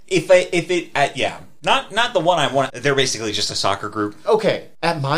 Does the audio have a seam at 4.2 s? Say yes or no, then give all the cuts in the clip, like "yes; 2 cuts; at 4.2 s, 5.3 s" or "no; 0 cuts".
yes; 2 cuts; at 2.7 s, 4.2 s